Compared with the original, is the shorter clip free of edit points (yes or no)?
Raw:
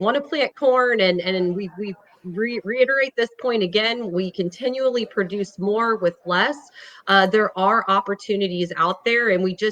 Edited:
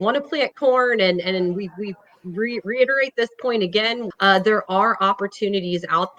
no